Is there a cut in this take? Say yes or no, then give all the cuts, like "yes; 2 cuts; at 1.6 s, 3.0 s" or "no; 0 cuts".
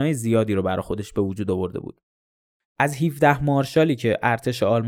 yes; 1 cut; at 2.6 s